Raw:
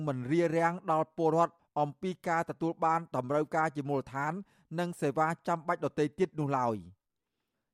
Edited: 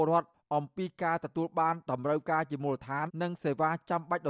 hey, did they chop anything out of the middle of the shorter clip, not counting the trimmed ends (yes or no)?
yes